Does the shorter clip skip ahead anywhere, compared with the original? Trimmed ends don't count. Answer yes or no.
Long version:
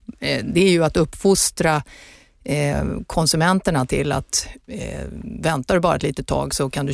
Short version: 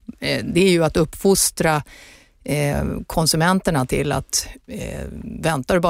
no